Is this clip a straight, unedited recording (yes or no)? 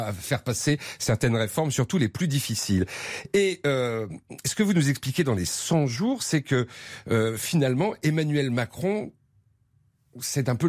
yes